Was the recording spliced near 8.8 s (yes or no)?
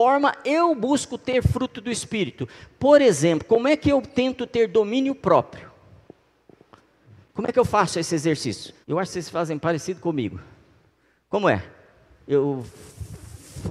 yes